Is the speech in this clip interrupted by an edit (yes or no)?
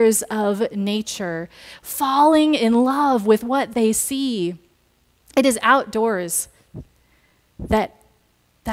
no